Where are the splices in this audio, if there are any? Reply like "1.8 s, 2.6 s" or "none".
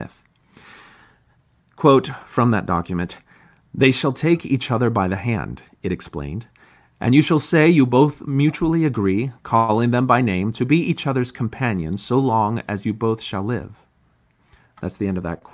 none